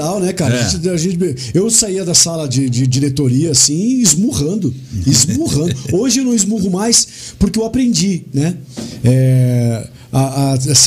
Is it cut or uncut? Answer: uncut